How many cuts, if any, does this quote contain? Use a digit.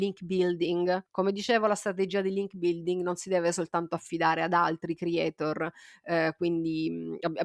1